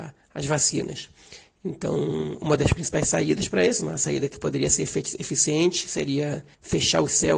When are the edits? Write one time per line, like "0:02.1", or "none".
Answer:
none